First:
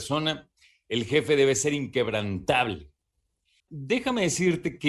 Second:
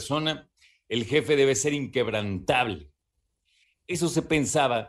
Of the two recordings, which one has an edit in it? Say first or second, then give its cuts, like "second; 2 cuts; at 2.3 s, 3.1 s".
first; 1 cut; at 3.6 s